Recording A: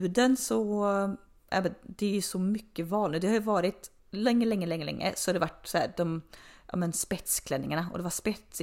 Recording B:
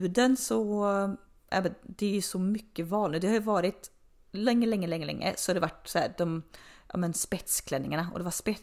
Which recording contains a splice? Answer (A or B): A